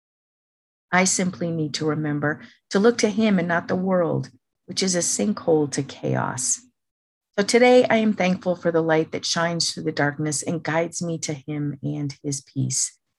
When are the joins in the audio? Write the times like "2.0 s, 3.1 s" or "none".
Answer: none